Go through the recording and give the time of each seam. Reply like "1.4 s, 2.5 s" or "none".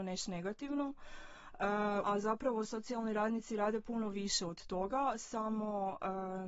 2.0 s